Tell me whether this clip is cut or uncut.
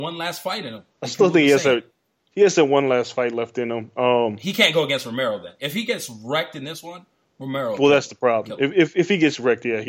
cut